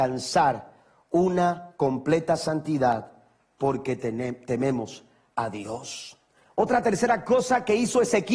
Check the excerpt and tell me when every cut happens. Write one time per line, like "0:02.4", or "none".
0:06.5

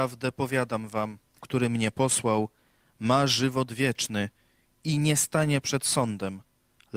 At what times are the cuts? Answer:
0:01.4

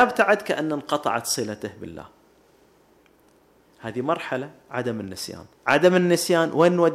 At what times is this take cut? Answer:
0:05.5

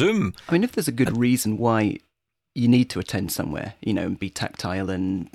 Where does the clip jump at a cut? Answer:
none

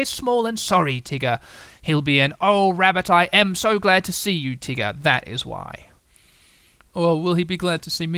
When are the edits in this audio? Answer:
none

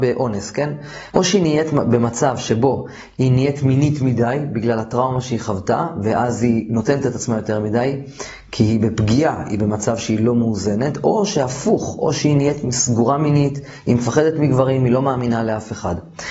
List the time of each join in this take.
0:01.1

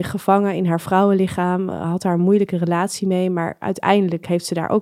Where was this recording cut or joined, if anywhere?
none

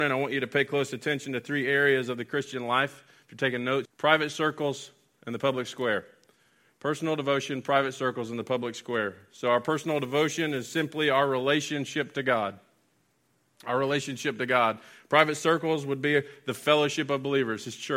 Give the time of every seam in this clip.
0:03.9

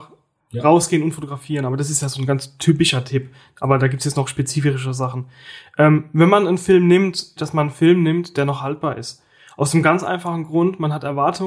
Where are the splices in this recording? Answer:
0:07.4

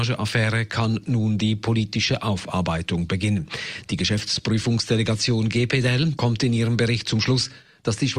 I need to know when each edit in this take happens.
0:06.2

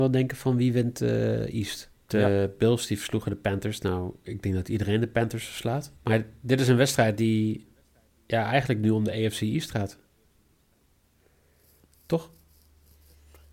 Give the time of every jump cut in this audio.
0:01.9
0:06.0

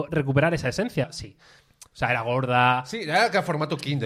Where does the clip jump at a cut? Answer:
0:01.0

